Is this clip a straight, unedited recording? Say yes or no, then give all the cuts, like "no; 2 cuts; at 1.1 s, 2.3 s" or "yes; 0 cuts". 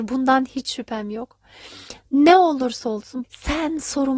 no; 1 cut; at 3.2 s